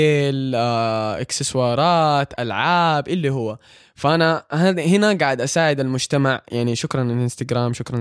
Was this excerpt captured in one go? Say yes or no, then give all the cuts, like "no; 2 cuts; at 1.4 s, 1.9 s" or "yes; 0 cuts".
yes; 0 cuts